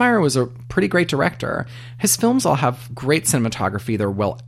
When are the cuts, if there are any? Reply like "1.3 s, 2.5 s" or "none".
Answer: none